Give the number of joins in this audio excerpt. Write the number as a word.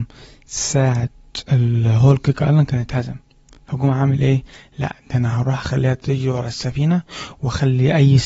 one